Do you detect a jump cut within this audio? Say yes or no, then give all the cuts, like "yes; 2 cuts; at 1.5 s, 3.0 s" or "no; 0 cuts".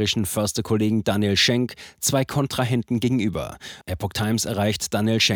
yes; 1 cut; at 3.8 s